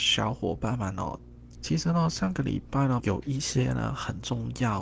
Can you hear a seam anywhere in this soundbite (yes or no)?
yes